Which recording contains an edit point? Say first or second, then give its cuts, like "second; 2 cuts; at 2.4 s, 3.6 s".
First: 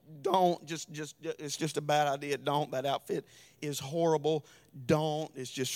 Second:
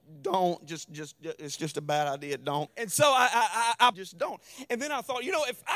second; 2 cuts; at 2.7 s, 3.9 s